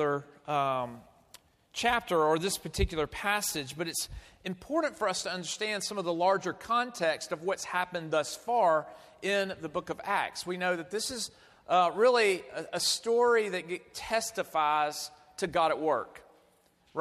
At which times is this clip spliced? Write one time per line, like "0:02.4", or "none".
none